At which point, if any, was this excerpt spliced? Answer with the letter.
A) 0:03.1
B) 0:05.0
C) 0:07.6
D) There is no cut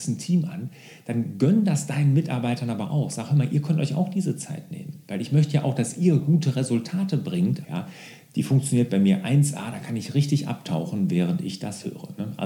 C